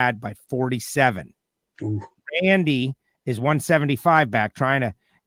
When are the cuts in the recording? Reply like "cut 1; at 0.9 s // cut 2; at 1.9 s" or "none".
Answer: none